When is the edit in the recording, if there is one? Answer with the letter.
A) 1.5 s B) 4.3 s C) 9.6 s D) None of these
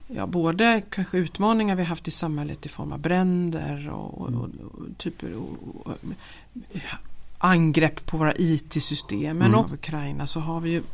C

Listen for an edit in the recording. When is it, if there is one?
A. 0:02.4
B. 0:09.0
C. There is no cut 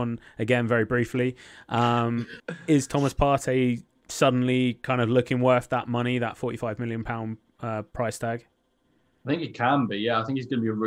A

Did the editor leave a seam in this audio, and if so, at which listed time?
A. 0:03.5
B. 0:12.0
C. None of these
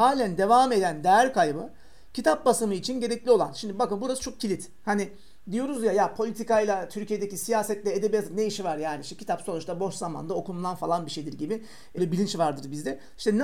B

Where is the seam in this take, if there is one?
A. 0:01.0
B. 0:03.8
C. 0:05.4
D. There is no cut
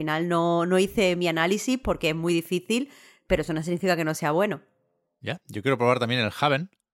D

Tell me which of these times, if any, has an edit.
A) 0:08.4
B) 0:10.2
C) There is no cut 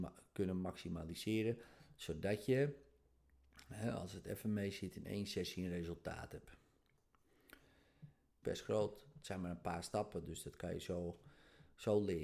A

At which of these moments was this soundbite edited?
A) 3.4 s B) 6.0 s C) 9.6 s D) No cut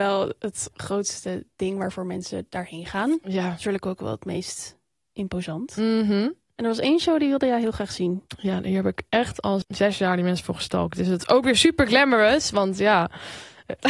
C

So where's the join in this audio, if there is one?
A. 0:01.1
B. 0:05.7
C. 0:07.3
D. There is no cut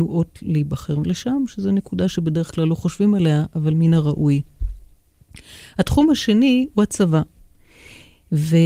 D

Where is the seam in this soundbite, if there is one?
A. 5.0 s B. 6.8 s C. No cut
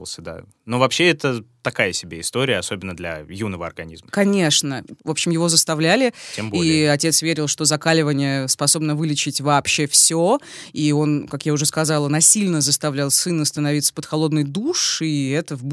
A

